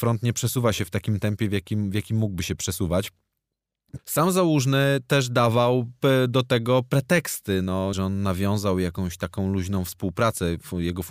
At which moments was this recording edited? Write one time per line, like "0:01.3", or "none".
0:04.0
0:07.9